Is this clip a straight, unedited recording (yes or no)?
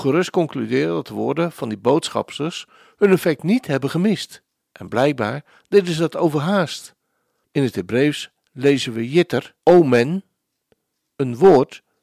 no